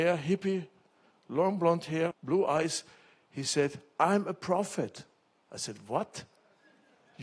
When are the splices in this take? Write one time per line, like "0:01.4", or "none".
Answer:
0:02.1